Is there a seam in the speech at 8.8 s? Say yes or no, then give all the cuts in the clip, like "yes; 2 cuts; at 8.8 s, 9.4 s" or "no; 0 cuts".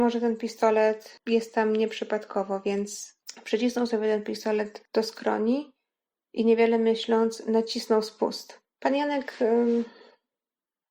yes; 1 cut; at 8.8 s